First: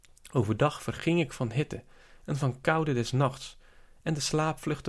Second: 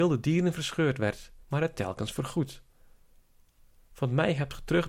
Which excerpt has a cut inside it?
second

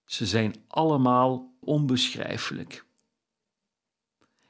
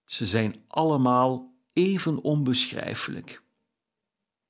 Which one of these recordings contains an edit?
first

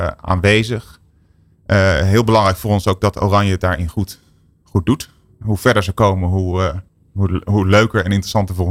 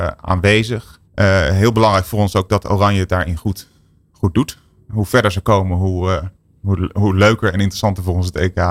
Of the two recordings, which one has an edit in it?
second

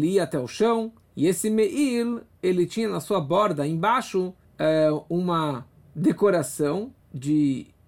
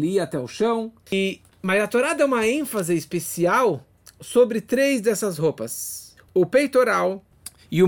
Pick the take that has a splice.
second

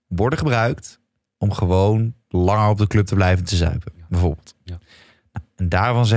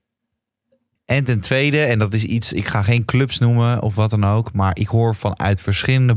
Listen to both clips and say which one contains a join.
second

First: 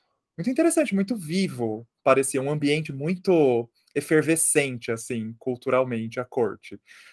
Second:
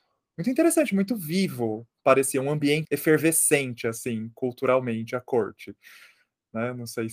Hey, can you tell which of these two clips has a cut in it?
second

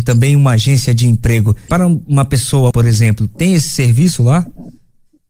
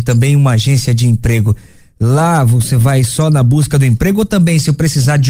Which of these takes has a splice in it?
first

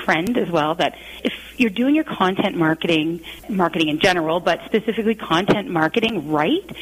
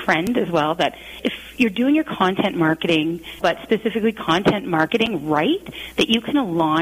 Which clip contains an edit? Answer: second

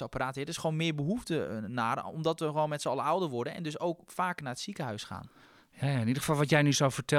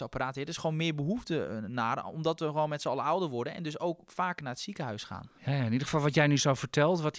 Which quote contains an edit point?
second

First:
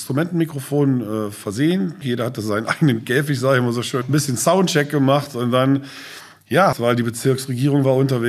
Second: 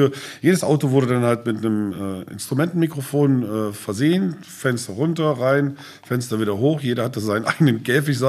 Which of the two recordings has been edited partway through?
first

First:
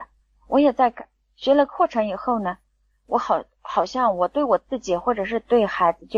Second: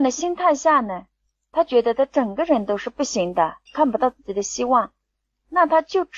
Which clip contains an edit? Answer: second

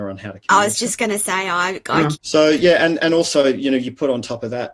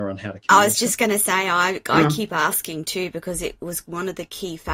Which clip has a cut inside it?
first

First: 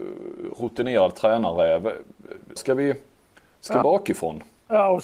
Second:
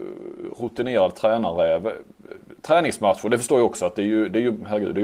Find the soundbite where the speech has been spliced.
first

